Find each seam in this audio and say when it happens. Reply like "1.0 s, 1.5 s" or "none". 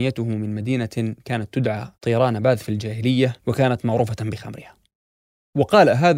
1.9 s, 3.4 s